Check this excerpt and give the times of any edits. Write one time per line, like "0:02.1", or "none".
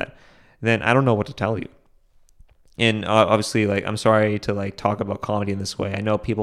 none